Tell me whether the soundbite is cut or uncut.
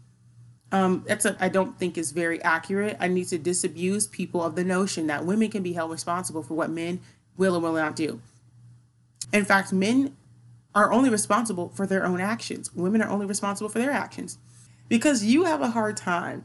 cut